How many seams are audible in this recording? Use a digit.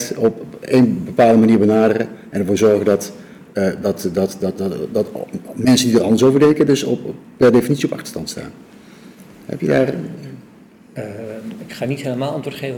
0